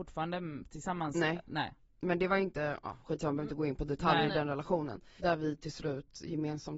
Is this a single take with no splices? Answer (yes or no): no